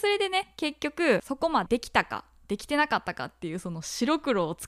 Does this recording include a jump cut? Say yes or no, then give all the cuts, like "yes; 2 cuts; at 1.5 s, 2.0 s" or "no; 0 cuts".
yes; 1 cut; at 1.7 s